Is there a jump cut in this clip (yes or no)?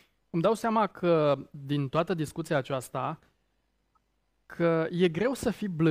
no